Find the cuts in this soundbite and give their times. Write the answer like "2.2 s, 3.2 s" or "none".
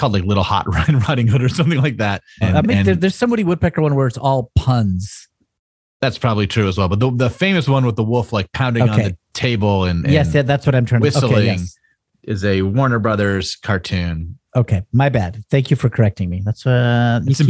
2.4 s